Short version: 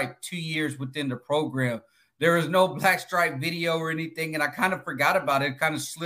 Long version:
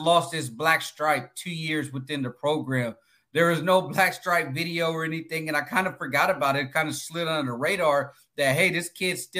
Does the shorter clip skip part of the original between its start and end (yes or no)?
no